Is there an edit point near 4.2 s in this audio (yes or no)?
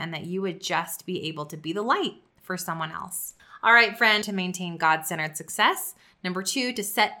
yes